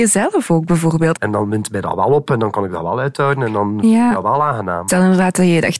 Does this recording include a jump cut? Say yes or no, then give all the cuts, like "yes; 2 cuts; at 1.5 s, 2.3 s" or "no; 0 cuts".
yes; 1 cut; at 1.1 s